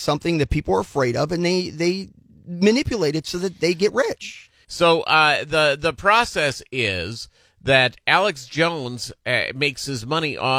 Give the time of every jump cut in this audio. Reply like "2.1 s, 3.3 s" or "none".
4.6 s